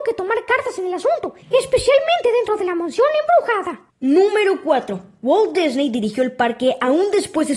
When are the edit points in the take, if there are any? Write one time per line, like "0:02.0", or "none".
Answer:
0:01.4
0:03.9